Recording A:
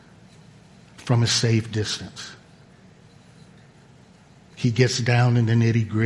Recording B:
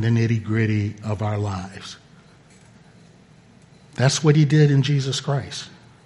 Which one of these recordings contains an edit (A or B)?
A